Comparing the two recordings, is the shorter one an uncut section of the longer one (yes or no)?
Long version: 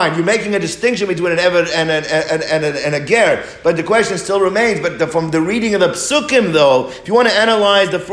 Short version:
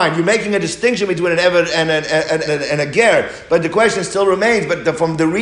no